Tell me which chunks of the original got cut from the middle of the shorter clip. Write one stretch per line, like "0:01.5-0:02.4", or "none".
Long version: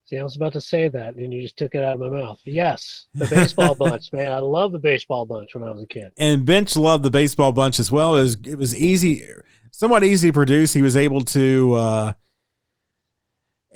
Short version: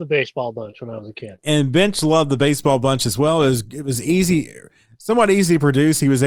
none